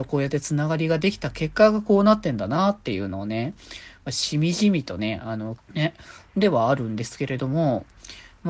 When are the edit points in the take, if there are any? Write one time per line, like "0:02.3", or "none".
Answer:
0:05.6